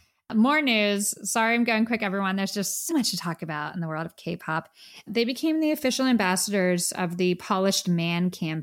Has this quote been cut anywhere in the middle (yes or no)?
yes